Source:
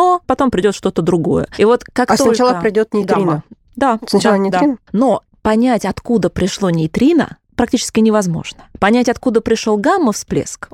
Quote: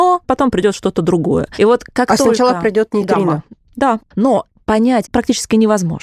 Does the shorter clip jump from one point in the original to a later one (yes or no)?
yes